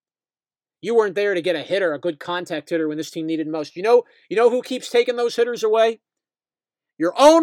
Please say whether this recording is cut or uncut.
uncut